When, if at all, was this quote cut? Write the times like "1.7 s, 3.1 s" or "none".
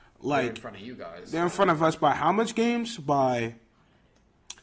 none